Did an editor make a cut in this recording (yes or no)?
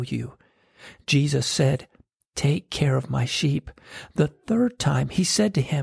no